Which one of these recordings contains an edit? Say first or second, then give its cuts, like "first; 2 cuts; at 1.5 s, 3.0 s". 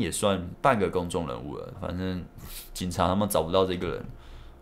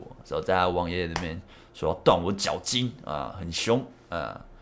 first; 1 cut; at 1.7 s